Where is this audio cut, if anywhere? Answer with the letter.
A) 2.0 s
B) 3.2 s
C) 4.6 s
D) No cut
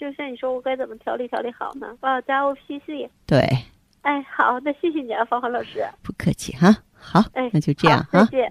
A